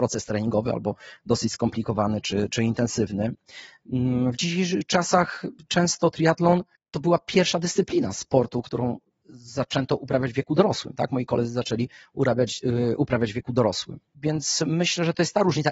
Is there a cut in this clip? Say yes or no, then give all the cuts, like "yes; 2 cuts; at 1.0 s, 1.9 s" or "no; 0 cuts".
no; 0 cuts